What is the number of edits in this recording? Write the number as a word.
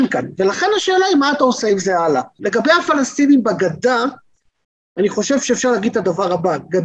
one